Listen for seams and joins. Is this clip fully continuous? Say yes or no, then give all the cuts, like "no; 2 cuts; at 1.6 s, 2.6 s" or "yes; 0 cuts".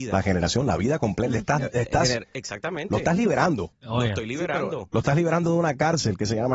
yes; 0 cuts